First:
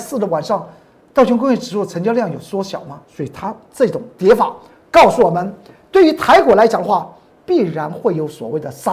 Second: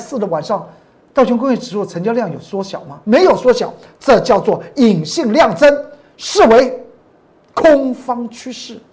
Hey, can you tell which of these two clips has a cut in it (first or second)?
first